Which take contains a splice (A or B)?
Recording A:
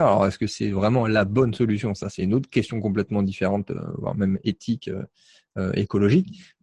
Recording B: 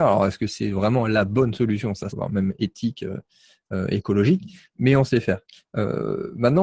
B